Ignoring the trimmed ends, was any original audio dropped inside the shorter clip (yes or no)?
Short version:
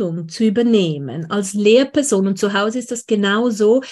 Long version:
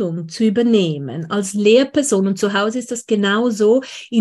no